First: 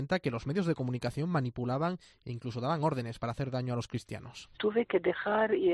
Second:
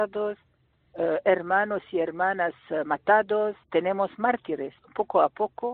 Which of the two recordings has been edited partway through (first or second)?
first